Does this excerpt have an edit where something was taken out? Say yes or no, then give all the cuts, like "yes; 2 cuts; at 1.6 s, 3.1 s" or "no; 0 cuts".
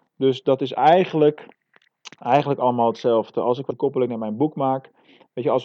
yes; 1 cut; at 3.7 s